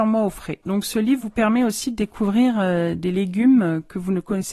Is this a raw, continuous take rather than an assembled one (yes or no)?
yes